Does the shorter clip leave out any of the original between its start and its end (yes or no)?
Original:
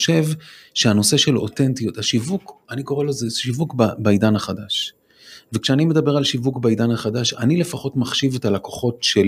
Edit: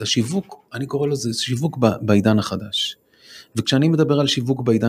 no